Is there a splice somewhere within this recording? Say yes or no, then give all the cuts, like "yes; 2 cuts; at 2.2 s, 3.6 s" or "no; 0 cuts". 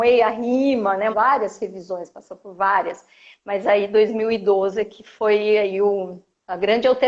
yes; 1 cut; at 1.1 s